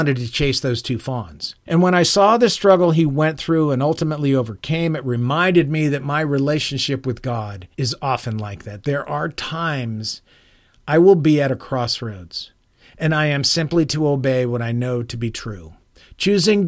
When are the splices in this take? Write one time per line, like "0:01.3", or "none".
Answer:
0:01.7
0:07.7